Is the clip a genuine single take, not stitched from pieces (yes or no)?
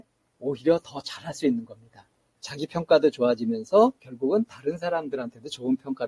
no